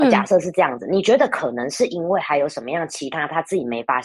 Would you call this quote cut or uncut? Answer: uncut